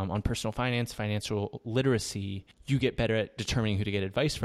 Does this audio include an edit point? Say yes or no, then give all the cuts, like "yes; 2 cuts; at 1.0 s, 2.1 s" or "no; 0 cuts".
no; 0 cuts